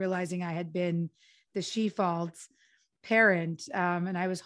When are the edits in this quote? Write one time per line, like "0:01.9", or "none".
none